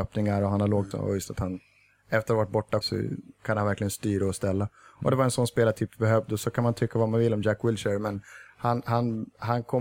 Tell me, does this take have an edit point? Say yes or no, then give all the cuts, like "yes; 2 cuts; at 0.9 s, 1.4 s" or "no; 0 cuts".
yes; 2 cuts; at 0.9 s, 2.8 s